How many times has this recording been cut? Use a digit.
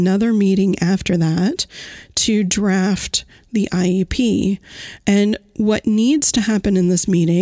0